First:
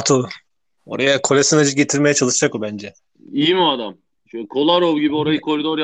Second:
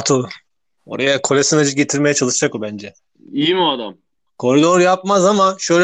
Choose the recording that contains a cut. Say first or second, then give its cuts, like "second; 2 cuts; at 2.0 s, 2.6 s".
second; 1 cut; at 4.2 s